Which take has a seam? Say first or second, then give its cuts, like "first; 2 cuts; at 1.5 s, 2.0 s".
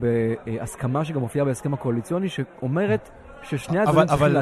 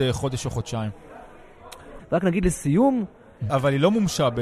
second; 2 cuts; at 2.0 s, 3.5 s